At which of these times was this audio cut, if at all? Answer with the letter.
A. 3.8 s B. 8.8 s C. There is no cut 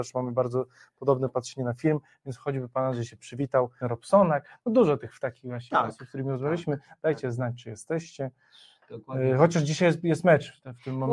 A